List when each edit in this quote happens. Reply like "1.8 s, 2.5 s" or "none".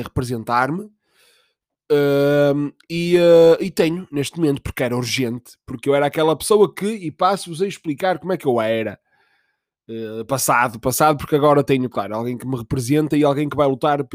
none